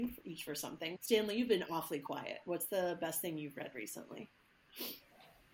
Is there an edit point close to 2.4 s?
no; 1 cut; at 1.0 s

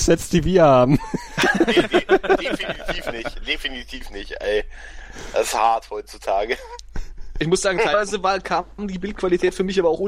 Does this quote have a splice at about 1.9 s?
no; 0 cuts

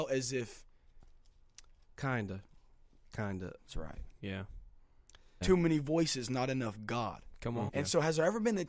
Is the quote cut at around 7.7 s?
yes; 3 cuts; at 3.6 s, 5.4 s, 7.7 s

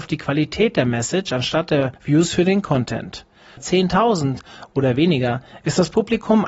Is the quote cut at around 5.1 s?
no; 2 cuts; at 2.0 s, 3.6 s

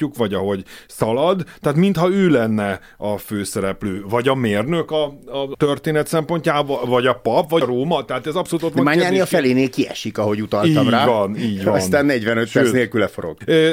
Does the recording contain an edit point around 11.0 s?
no; 0 cuts

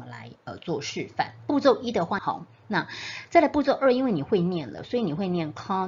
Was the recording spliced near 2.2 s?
yes; 1 cut; at 2.2 s

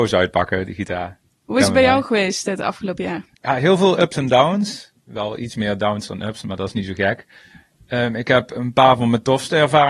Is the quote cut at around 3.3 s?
yes; 1 cut; at 3.3 s

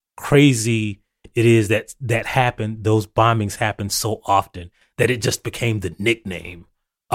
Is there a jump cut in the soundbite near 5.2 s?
no; 0 cuts

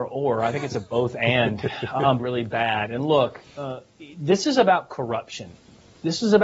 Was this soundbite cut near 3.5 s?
no; 1 cut; at 2.2 s

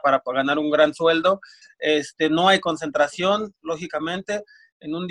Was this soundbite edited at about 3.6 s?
no; 1 cut; at 1.6 s

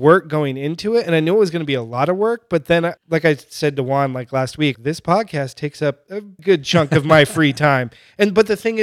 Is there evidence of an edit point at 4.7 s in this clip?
yes; 3 cuts; at 3.0 s, 4.7 s, 6.4 s

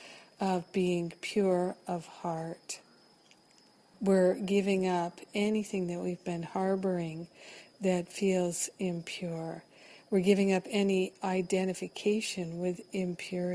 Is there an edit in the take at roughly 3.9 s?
yes; 1 cut; at 3.9 s

